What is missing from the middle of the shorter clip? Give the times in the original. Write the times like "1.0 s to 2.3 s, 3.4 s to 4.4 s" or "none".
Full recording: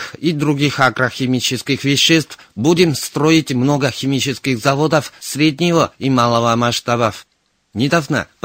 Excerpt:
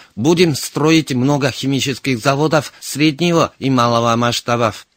none